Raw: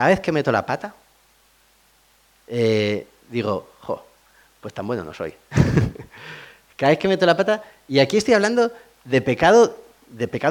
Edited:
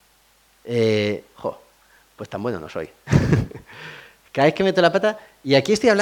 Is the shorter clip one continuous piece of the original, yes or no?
no